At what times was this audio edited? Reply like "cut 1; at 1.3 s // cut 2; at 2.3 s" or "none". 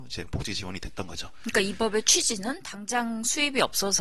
none

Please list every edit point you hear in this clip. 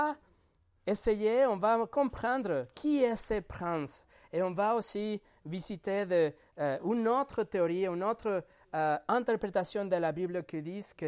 none

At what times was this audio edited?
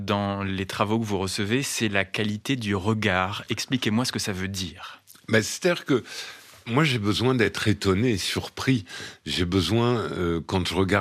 none

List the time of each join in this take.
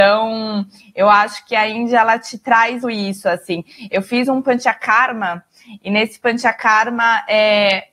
cut 1; at 2.8 s

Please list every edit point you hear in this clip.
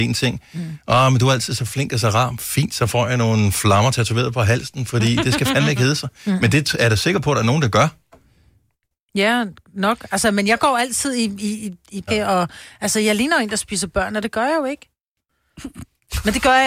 cut 1; at 12.1 s

